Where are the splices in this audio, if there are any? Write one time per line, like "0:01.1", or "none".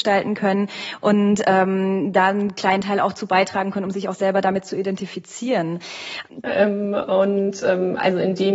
0:06.4